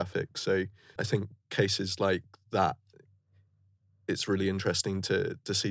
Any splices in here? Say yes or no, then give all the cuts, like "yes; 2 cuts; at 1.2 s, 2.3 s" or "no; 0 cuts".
yes; 1 cut; at 1.0 s